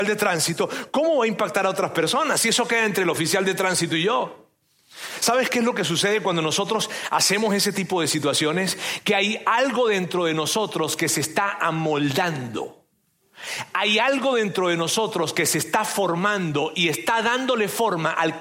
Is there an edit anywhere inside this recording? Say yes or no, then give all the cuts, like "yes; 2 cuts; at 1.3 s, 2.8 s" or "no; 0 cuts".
no; 0 cuts